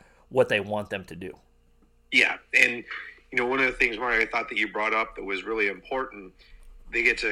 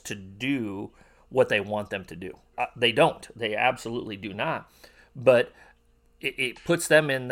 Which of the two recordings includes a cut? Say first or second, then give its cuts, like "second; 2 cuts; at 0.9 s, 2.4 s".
second; 1 cut; at 2.5 s